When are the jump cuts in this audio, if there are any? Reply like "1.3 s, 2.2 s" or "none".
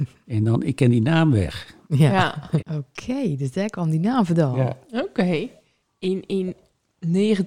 2.6 s